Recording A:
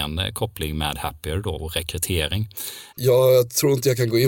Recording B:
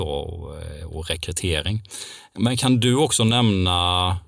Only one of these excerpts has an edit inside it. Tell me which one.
A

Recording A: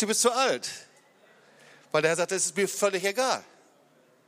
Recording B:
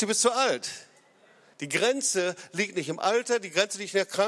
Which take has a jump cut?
B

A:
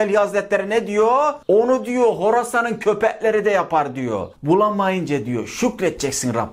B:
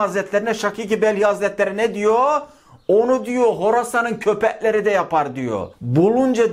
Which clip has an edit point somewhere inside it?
A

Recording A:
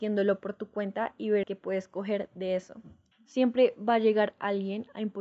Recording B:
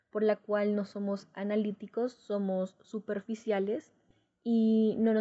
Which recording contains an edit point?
A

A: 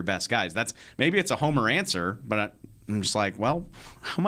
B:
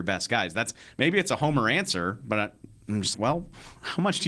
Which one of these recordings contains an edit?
B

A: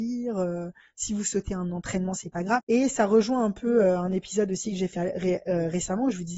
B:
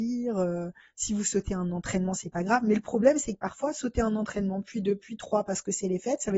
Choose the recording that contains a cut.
A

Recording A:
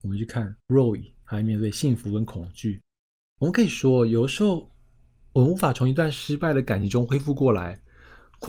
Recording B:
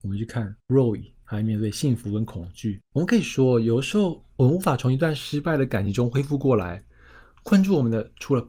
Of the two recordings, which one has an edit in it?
B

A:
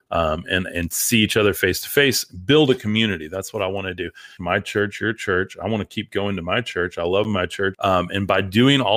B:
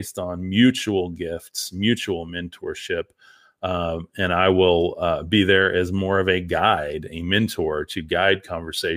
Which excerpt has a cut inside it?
A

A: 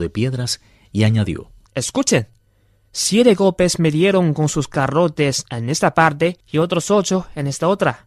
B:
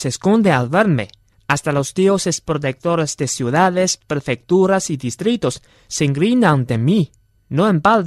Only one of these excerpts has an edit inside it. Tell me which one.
A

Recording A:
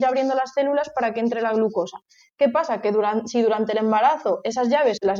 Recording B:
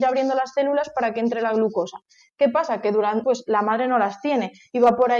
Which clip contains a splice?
B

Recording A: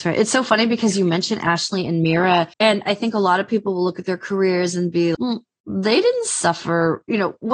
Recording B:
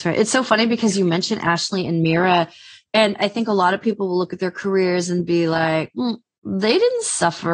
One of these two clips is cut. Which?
A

